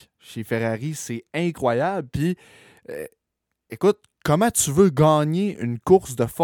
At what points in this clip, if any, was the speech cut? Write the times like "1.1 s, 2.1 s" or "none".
none